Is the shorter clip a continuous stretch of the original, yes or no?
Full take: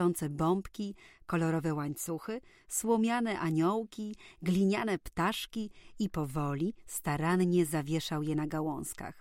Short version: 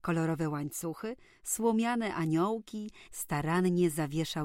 no